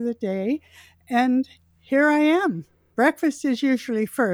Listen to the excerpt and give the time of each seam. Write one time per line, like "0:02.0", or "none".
none